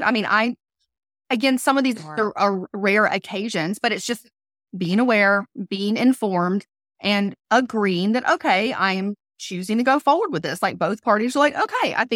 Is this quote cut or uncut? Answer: uncut